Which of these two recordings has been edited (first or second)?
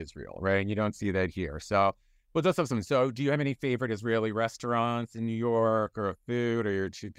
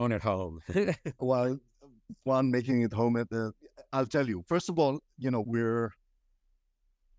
second